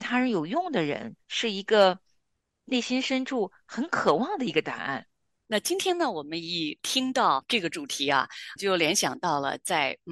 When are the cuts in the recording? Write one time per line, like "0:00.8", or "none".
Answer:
0:01.2